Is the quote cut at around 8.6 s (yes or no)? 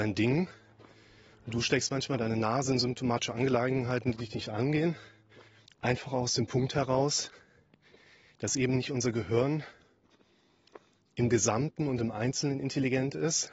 no